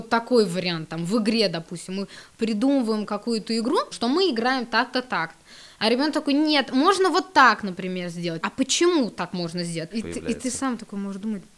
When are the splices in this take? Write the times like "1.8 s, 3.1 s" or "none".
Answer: 3.9 s, 8.4 s, 9.9 s